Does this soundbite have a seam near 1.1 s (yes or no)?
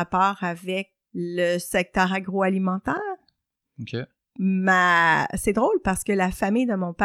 yes